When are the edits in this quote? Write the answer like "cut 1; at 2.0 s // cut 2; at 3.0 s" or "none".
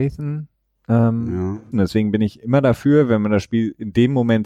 cut 1; at 1.7 s